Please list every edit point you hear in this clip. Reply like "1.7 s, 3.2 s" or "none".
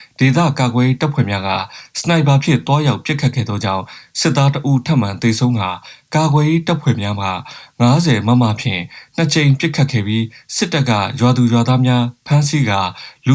none